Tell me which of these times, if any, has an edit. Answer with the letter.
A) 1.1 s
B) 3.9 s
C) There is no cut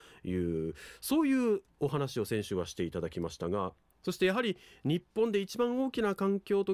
B